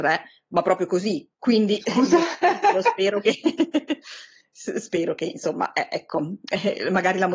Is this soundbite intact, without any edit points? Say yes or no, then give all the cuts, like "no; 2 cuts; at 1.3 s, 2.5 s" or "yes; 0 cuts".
no; 1 cut; at 1.3 s